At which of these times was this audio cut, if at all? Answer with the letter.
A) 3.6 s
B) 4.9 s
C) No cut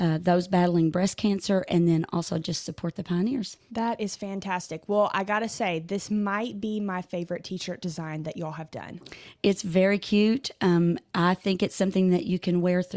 A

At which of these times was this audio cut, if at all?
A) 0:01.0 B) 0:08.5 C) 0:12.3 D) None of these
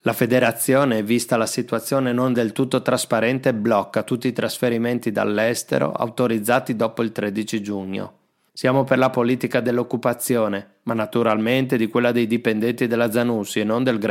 B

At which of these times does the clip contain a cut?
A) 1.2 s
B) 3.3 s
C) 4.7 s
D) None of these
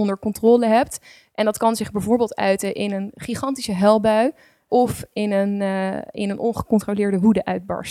C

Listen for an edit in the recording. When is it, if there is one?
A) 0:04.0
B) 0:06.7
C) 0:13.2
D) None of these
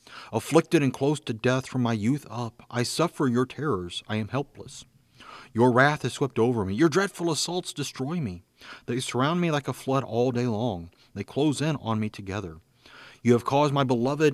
D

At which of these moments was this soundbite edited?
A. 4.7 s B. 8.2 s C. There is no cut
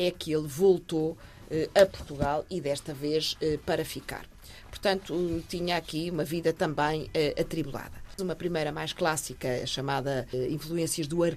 B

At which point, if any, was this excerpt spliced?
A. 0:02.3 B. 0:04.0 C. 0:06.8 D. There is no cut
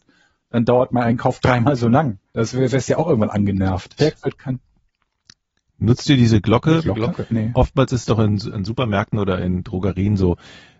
B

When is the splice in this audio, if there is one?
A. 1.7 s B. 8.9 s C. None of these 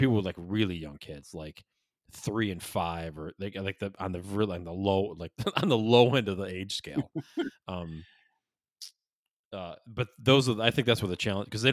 C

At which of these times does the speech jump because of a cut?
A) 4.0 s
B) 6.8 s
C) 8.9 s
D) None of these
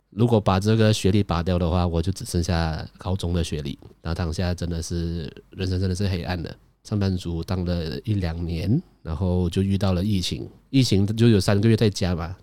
B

